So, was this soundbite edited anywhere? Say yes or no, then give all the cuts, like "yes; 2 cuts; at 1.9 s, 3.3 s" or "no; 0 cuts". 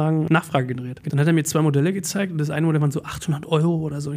yes; 1 cut; at 1.0 s